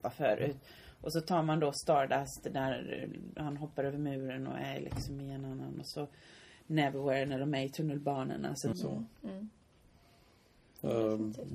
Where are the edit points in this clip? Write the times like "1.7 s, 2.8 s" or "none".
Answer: 8.7 s